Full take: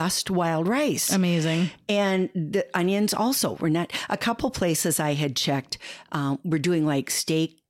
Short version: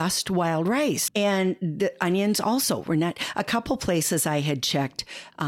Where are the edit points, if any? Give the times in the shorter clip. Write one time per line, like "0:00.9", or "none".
0:01.1